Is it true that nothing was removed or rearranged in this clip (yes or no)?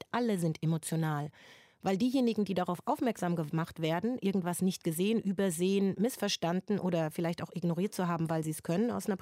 yes